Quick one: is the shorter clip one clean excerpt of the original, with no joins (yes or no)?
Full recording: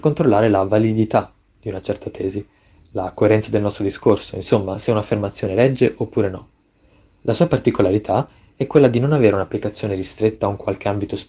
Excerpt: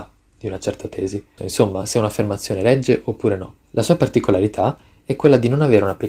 no